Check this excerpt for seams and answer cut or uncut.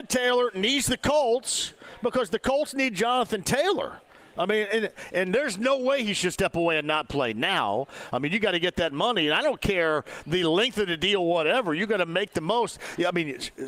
uncut